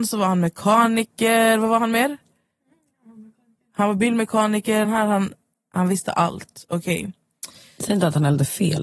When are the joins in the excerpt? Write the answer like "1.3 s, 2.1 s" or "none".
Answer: 4.8 s